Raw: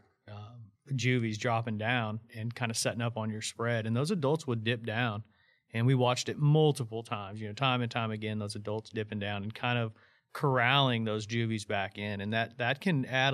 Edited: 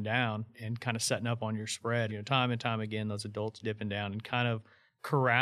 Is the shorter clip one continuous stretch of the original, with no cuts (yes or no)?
no